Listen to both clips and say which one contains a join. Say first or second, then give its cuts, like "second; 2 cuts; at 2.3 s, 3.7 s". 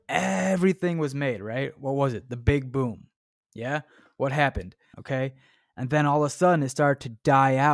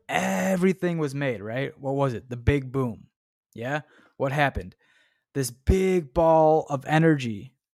first; 1 cut; at 4.9 s